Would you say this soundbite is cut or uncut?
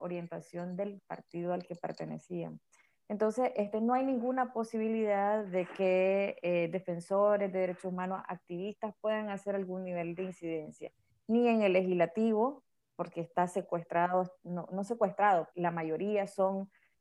cut